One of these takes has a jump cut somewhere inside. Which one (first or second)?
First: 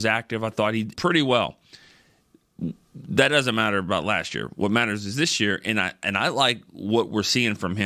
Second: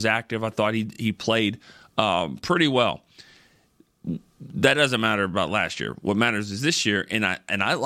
first